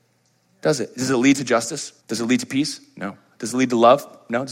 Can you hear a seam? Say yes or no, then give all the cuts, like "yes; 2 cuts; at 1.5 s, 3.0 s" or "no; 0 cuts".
yes; 1 cut; at 2.0 s